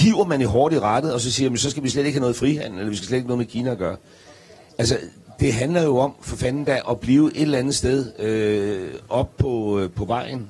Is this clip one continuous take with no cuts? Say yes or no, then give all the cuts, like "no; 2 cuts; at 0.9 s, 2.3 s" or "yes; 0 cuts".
yes; 0 cuts